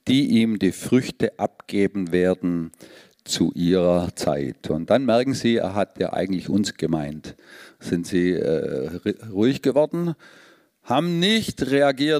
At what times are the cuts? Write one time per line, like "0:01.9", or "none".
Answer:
none